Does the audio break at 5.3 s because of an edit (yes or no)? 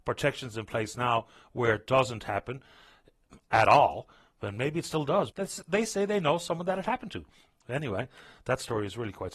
yes